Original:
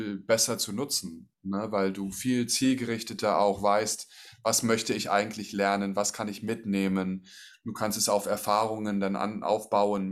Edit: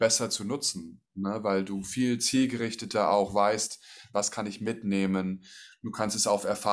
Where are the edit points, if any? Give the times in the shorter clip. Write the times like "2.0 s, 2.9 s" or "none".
4.1 s